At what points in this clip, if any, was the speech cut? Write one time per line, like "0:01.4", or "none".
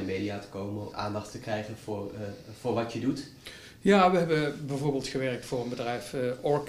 0:00.9